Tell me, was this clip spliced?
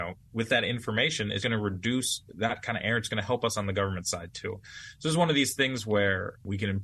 yes; 1 cut; at 1.4 s

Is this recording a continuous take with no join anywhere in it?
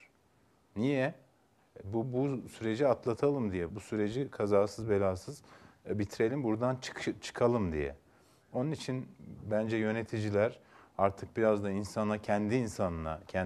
no; 1 cut; at 3.7 s

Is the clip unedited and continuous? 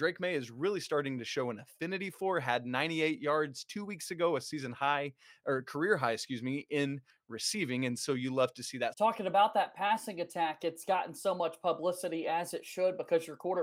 no; 1 cut; at 8.9 s

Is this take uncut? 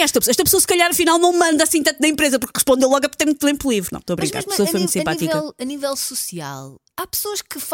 no; 1 cut; at 3.9 s

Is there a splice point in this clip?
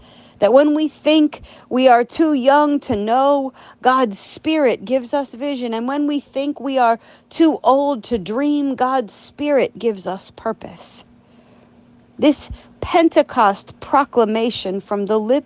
no; 0 cuts

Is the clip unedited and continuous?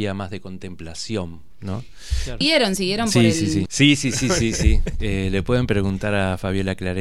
no; 2 cuts; at 2.4 s, 3.7 s

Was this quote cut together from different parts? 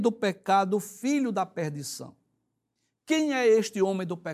no; 0 cuts

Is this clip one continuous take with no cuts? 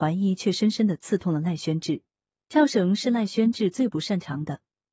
no; 1 cut; at 2.3 s

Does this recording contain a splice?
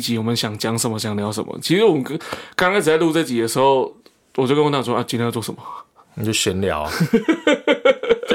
no; 0 cuts

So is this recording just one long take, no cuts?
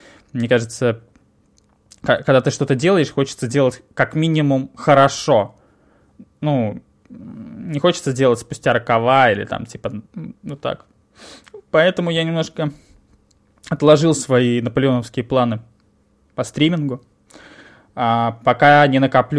no; 1 cut; at 10.1 s

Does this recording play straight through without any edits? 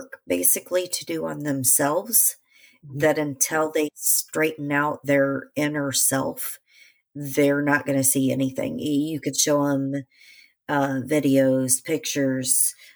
yes; 0 cuts

